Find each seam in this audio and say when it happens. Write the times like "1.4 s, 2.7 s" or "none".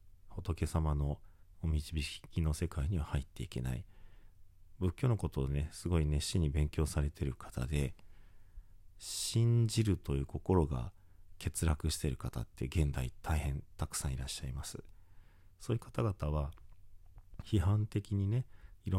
17.4 s

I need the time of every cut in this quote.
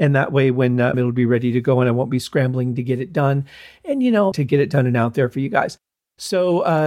0.9 s, 4.3 s

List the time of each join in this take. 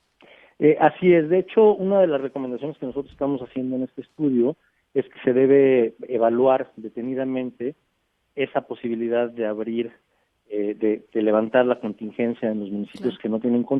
none

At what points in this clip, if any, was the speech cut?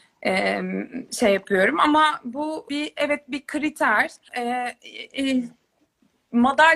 2.7 s, 4.3 s

